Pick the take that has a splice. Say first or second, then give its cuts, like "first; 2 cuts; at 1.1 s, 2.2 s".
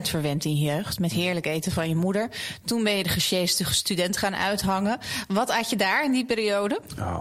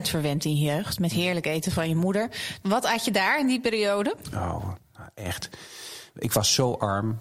second; 1 cut; at 2.6 s